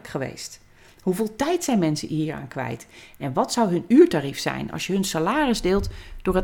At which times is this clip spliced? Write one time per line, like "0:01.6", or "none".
none